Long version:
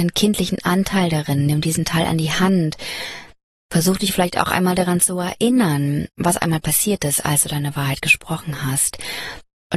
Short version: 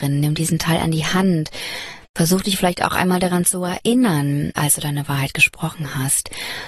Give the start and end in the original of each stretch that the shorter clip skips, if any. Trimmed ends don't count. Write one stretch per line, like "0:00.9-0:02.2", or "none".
0:03.3-0:03.6
0:06.1-0:07.2